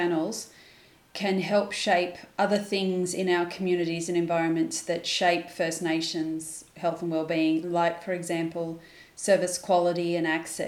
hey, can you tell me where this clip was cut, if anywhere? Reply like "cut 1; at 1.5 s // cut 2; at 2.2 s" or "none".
cut 1; at 7.6 s